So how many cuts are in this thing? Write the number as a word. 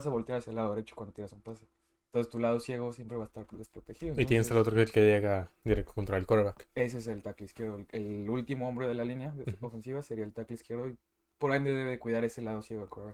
zero